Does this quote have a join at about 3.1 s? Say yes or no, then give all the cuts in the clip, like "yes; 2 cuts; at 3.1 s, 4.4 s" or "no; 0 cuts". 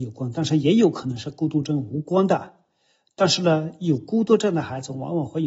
no; 0 cuts